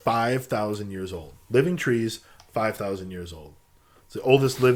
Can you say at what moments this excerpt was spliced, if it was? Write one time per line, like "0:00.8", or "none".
none